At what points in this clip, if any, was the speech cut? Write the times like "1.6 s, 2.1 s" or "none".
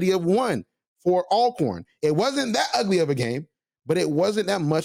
2.0 s